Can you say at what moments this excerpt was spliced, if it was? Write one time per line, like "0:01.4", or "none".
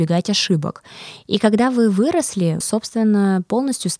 0:01.2
0:02.6